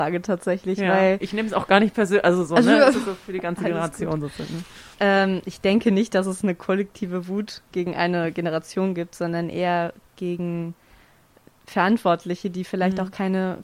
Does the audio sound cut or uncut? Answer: uncut